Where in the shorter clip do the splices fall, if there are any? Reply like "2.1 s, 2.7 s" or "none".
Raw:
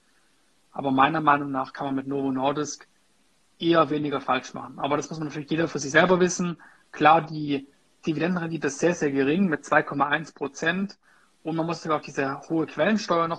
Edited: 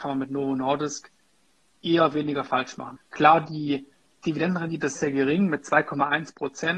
3.0 s, 5.0 s